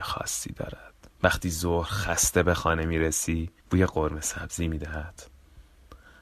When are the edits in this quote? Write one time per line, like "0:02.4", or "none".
0:01.1
0:03.6